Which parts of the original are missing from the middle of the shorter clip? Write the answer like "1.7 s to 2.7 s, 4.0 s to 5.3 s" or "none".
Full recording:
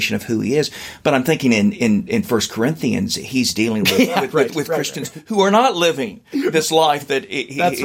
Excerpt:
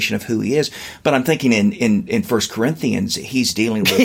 none